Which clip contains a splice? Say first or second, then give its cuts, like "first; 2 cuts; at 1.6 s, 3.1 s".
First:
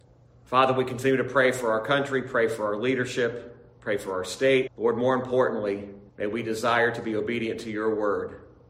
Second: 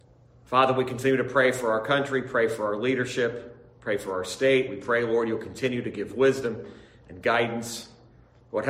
first; 2 cuts; at 4.7 s, 6.1 s